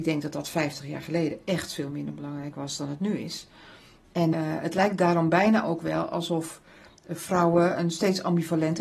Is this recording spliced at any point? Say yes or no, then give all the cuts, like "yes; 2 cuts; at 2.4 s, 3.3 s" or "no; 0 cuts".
yes; 1 cut; at 4.3 s